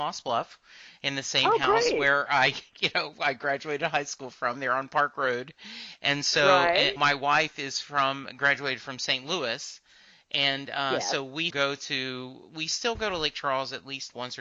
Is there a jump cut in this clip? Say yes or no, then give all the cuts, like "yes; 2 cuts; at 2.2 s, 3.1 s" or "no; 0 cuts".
yes; 2 cuts; at 7.0 s, 11.5 s